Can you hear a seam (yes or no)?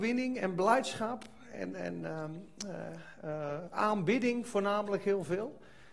no